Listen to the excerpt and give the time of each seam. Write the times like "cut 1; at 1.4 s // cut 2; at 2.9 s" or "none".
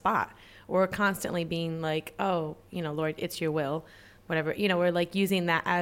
none